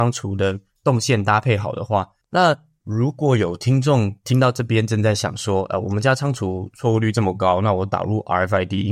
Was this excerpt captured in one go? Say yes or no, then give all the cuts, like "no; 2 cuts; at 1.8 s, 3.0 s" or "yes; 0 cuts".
no; 1 cut; at 2.2 s